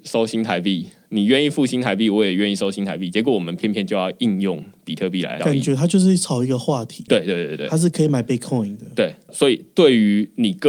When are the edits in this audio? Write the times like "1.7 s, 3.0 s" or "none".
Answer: 7.1 s